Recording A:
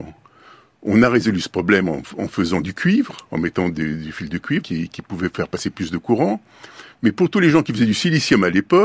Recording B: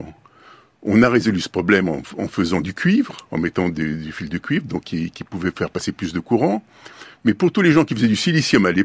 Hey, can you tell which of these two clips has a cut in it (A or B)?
A